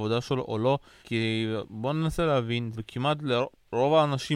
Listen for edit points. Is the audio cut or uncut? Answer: cut